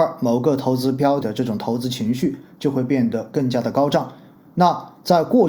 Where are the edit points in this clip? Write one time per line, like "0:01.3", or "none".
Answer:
0:01.2